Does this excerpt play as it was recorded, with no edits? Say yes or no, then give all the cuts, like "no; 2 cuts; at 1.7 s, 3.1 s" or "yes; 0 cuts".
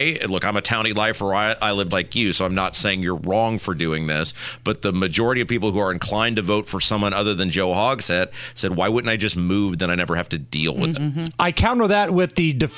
no; 2 cuts; at 1.9 s, 10.9 s